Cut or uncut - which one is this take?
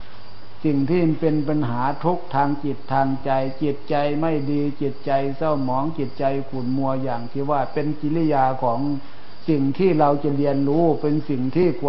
uncut